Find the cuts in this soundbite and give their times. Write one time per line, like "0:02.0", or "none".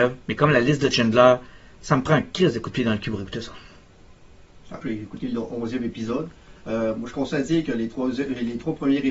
0:04.8